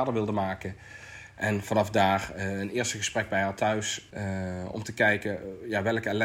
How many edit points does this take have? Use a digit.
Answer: 1